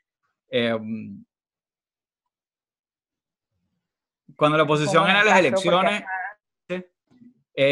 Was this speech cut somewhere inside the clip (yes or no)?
yes